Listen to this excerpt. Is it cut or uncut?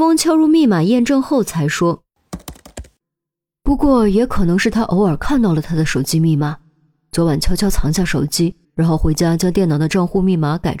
cut